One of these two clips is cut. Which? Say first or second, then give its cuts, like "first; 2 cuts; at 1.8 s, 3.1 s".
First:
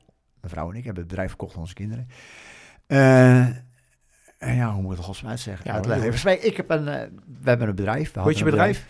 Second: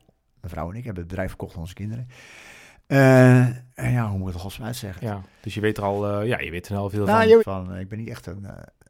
second; 3 cuts; at 3.7 s, 5.0 s, 7.4 s